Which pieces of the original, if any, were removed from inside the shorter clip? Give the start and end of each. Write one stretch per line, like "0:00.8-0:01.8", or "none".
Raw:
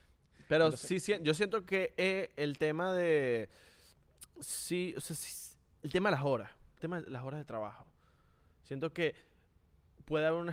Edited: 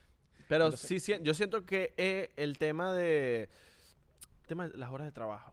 0:04.3-0:06.7

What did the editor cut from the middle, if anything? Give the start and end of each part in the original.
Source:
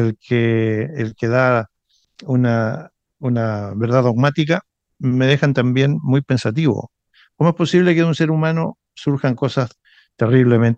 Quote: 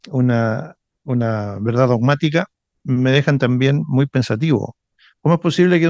none

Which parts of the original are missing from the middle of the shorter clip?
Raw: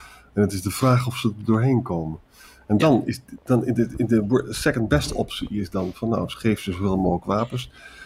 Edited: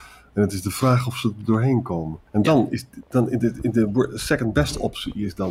0:02.3-0:02.6

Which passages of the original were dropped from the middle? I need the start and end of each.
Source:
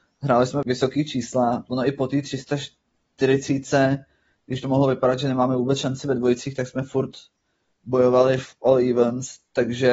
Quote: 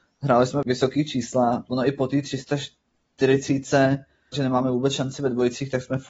0:04.3-0:05.2

